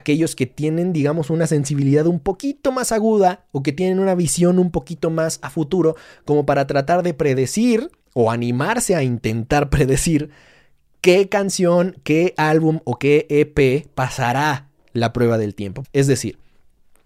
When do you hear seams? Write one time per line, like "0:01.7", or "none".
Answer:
0:08.0
0:15.8